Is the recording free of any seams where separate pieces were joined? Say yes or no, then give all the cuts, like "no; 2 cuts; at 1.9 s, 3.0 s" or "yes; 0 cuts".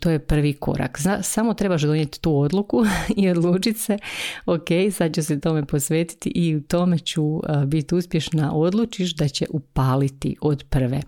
yes; 0 cuts